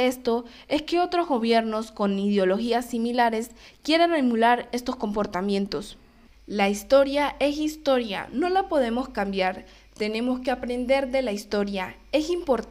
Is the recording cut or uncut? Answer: uncut